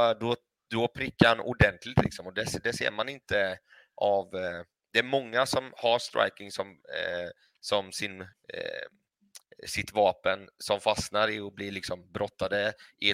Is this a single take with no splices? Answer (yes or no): no